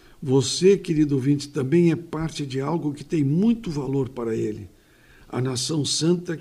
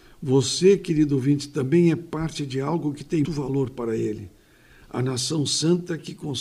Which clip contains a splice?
second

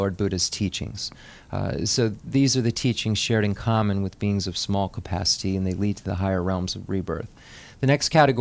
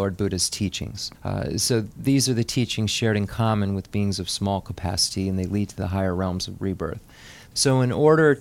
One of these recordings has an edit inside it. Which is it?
second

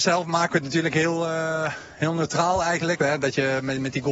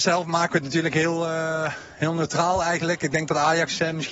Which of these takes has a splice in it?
first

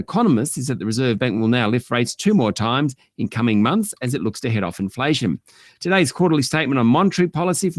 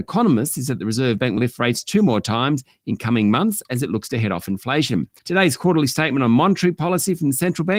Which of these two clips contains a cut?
second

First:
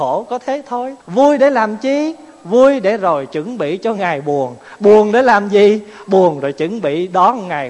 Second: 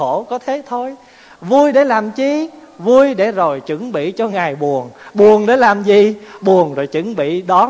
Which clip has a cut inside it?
first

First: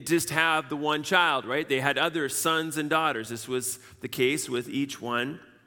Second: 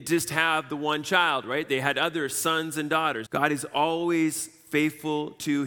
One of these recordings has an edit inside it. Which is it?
second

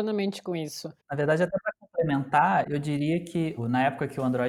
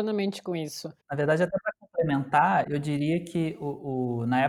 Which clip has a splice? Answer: first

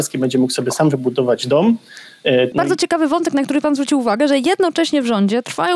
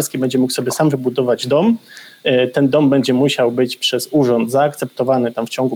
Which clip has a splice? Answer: first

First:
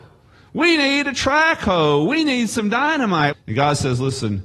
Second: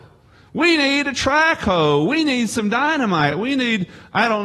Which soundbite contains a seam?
first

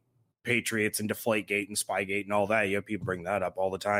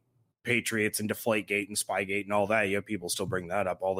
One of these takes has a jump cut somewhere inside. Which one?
first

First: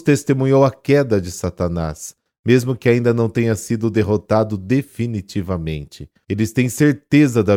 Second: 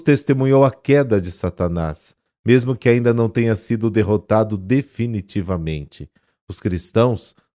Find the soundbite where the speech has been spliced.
first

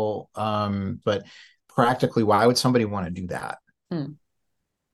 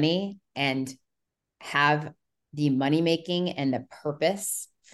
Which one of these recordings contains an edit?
first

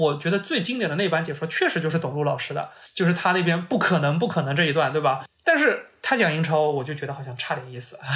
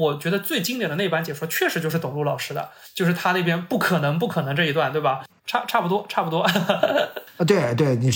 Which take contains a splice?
second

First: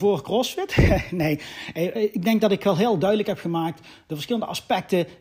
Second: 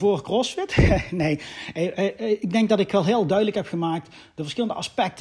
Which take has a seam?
first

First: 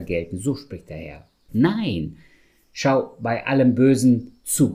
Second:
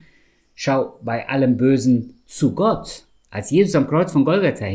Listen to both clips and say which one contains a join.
first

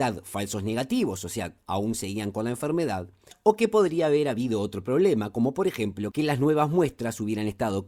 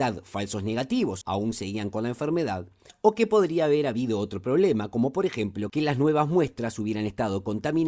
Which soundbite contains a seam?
second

